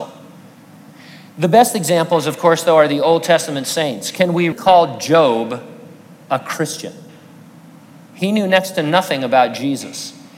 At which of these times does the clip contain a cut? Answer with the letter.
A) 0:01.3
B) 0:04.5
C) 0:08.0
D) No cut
B